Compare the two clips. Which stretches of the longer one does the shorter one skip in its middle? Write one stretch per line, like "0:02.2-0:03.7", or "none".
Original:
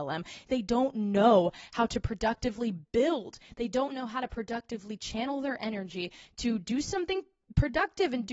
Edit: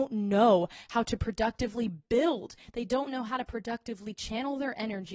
none

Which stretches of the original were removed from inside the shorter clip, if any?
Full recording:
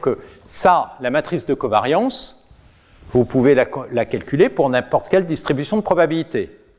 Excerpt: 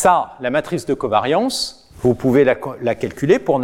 0:02.5-0:03.0

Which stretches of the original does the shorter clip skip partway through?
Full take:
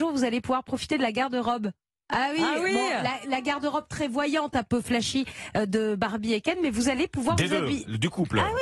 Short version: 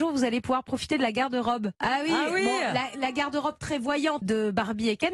0:01.7-0:02.0
0:04.5-0:05.7

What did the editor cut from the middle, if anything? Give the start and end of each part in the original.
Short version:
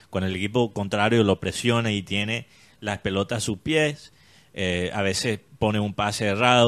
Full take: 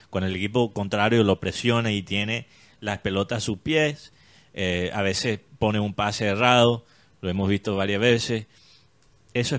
none

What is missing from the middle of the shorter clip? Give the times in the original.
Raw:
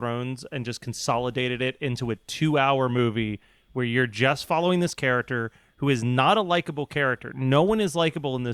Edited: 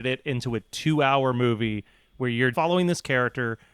0:04.1-0:04.5

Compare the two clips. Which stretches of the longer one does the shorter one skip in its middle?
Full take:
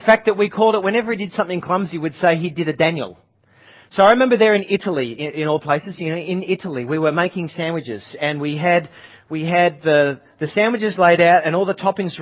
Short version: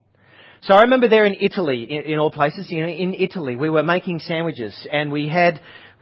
none

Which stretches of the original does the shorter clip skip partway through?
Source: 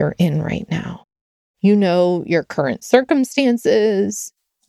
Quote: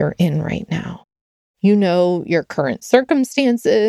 none

